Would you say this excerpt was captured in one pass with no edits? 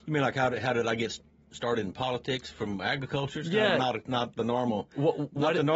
yes; 0 cuts

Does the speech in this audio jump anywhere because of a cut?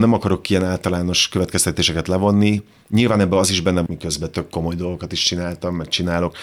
yes; 1 cut; at 3.9 s

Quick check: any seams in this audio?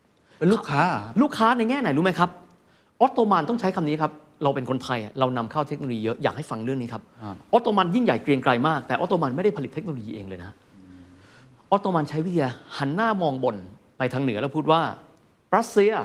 no; 0 cuts

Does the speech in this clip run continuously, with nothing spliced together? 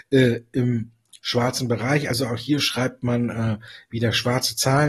yes; 0 cuts

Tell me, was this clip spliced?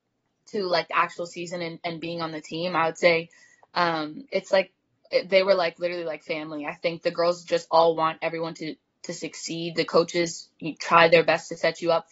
no; 0 cuts

